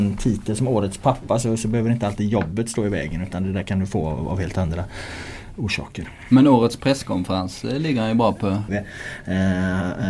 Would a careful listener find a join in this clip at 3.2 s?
no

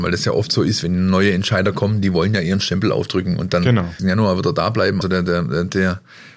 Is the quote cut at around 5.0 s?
yes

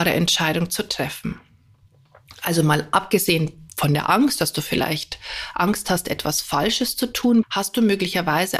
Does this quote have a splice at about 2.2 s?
no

